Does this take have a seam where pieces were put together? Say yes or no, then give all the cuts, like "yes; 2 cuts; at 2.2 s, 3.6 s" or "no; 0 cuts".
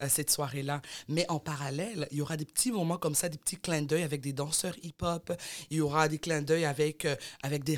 no; 0 cuts